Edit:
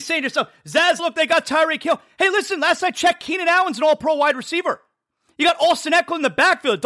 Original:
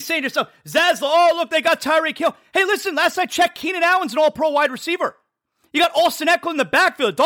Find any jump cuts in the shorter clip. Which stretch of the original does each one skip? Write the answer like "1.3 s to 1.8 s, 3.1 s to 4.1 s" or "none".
1.0 s to 1.3 s